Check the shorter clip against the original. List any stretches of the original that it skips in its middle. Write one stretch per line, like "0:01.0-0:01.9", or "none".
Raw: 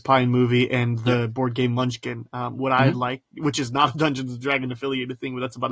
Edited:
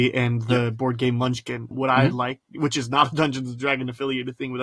0:02.3-0:02.5